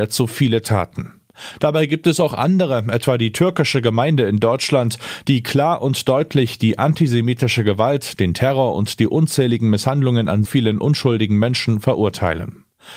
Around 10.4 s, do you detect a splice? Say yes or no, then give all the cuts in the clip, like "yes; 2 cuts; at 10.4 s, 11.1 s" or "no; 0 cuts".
yes; 1 cut; at 10.4 s